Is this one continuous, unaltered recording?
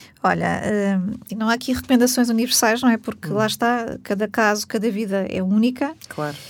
no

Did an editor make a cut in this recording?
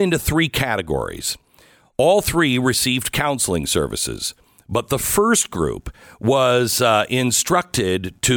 no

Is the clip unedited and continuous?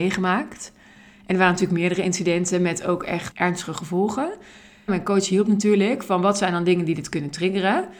no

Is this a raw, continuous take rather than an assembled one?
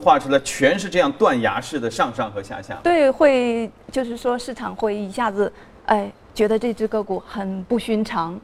yes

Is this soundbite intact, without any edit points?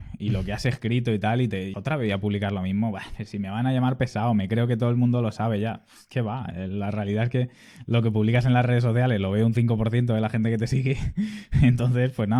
no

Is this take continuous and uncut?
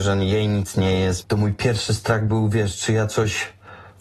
no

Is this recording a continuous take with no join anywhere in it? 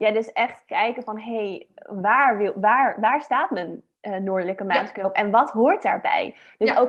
yes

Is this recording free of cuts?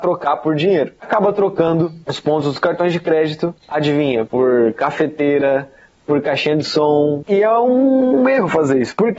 no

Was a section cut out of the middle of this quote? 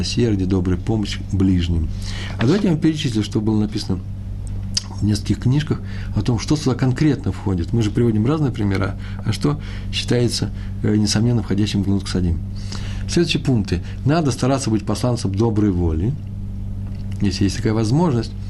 no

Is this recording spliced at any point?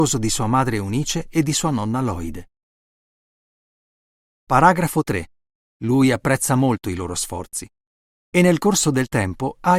yes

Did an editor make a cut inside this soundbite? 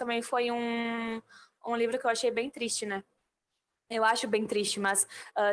no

